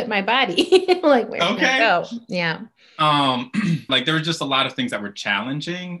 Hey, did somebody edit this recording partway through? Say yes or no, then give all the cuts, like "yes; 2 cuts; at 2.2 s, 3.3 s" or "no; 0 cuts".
yes; 1 cut; at 3.9 s